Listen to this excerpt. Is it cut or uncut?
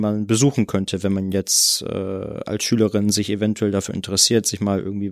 uncut